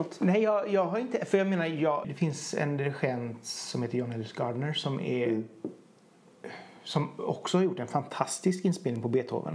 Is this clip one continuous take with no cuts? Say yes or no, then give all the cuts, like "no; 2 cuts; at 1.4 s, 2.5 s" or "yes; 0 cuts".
no; 1 cut; at 2.0 s